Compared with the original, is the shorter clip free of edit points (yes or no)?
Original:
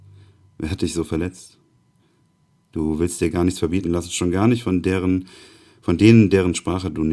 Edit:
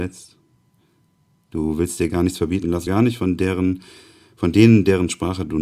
no